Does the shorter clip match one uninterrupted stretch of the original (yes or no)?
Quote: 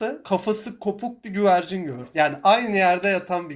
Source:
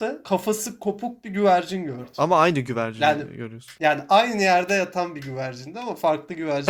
no